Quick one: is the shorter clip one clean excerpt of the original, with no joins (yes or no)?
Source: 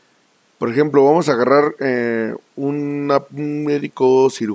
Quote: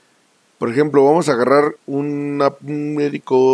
no